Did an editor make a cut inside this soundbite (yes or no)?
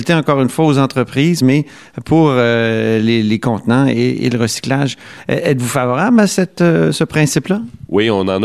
no